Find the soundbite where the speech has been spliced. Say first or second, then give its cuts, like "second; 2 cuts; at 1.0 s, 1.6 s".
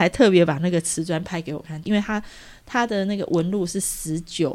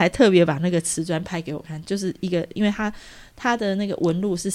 first; 1 cut; at 1.8 s